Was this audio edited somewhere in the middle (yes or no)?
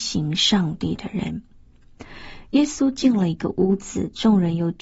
no